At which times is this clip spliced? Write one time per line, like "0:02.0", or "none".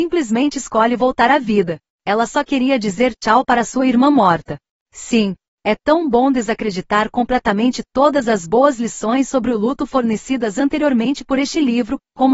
0:04.8